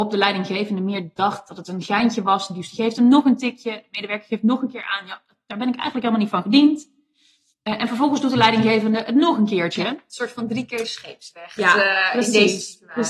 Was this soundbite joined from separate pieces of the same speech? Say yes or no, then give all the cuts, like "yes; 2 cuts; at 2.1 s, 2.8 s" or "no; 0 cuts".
no; 0 cuts